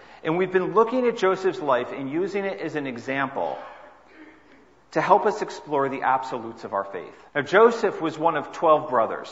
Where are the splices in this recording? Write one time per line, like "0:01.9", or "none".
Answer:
0:07.3